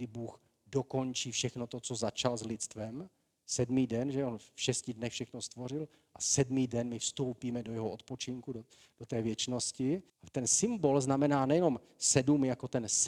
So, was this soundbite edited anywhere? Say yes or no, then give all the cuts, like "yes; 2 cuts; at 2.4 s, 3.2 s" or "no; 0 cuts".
yes; 1 cut; at 10.1 s